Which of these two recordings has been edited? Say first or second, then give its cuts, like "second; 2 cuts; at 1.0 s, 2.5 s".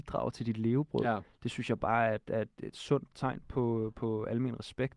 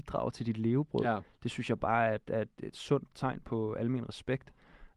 second; 1 cut; at 3.4 s